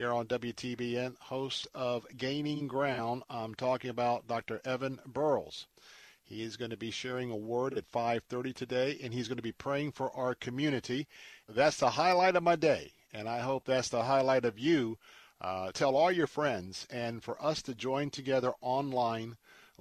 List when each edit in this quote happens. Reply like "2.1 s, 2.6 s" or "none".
11.5 s, 15.7 s